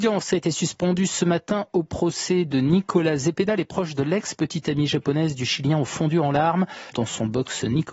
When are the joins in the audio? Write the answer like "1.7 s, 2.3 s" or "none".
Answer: 6.9 s